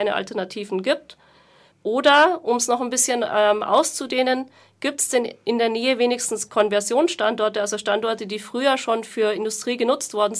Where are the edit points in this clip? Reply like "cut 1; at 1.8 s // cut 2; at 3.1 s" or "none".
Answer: cut 1; at 1.7 s